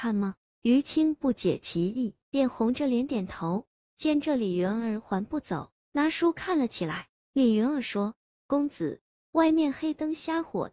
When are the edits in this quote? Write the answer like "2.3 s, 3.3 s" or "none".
2.2 s, 3.8 s, 5.8 s